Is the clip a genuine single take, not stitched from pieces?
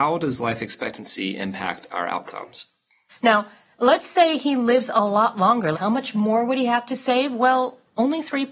no; 2 cuts; at 3.1 s, 5.7 s

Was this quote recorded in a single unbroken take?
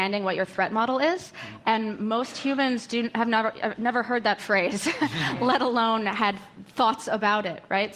yes; 0 cuts

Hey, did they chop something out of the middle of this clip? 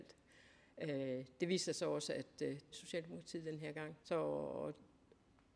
yes; 2 cuts; at 2.7 s, 4.0 s

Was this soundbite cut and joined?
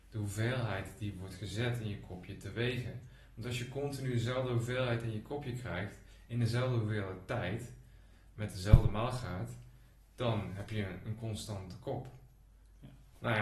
no; 0 cuts

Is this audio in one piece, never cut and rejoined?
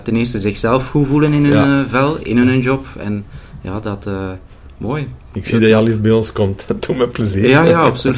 yes; 0 cuts

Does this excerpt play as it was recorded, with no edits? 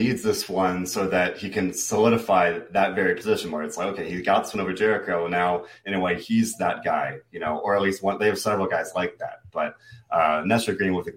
yes; 0 cuts

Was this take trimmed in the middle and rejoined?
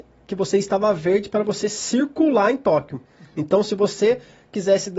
no; 0 cuts

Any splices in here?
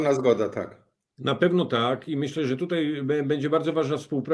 no; 0 cuts

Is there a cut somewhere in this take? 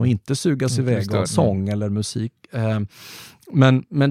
yes; 1 cut; at 1.2 s

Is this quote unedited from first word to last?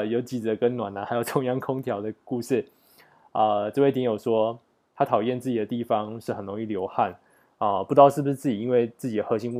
yes; 0 cuts

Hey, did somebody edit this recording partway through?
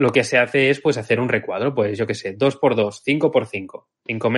no; 0 cuts

